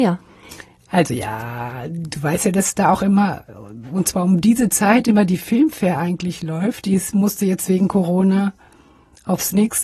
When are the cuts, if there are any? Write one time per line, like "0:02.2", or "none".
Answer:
none